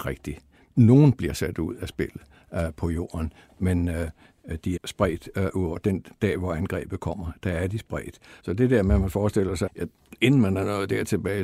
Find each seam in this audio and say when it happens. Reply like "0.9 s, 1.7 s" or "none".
4.8 s, 8.4 s, 9.7 s

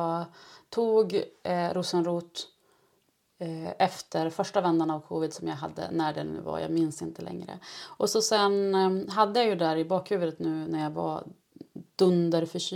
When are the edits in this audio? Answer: none

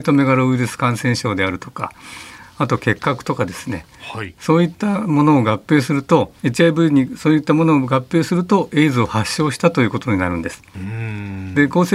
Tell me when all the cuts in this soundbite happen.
6.4 s

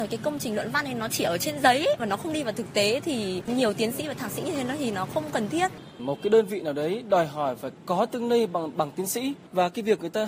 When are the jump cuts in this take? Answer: none

